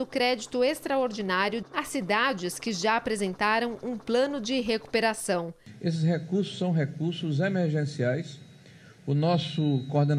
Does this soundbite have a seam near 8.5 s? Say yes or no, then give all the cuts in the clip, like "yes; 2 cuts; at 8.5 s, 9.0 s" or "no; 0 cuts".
no; 0 cuts